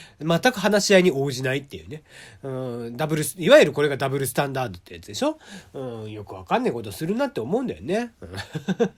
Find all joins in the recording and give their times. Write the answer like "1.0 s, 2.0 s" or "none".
none